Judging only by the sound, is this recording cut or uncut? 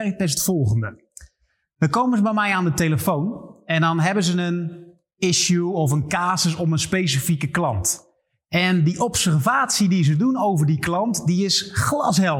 uncut